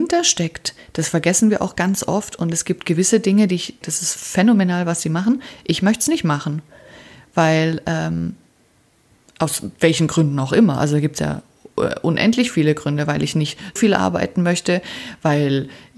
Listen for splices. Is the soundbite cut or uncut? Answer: cut